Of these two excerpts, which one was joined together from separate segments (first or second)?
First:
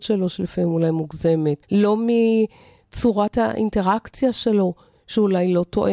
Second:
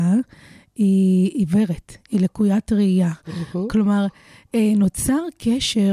first